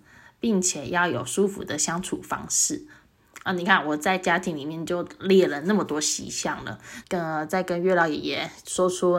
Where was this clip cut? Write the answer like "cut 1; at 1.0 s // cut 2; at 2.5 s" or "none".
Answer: cut 1; at 7.0 s